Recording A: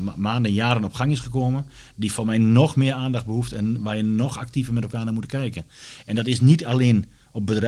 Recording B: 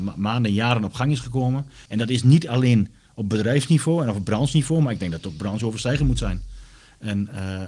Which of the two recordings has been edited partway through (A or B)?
B